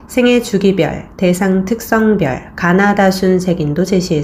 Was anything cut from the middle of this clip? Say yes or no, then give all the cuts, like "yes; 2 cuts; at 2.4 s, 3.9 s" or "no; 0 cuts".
no; 0 cuts